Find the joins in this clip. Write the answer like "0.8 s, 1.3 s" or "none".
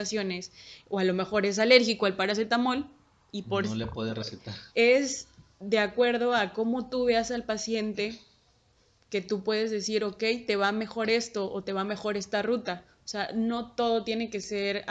4.7 s

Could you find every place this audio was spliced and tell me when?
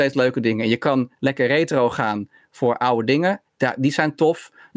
1.2 s

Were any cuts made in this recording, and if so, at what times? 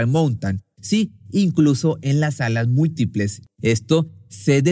3.5 s

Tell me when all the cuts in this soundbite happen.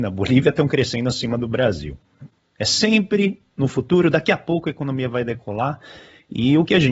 2.4 s

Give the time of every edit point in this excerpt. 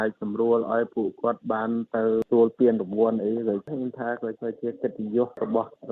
2.3 s

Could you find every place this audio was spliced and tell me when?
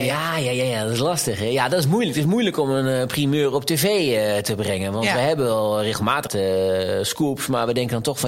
6.3 s

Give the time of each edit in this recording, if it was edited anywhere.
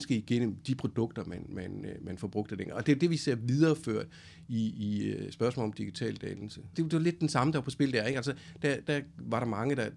6.7 s

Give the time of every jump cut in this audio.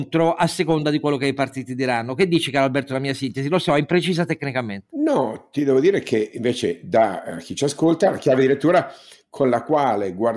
none

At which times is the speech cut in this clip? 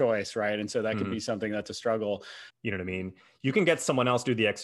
2.5 s

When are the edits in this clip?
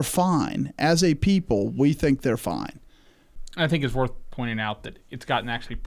none

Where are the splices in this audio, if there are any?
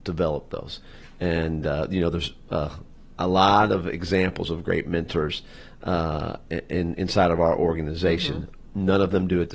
none

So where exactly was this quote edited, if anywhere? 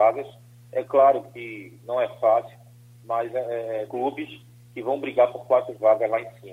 3.9 s

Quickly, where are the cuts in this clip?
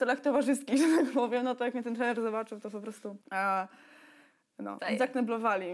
3.2 s, 4.8 s

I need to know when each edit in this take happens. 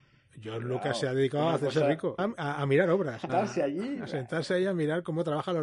2.2 s, 3.3 s

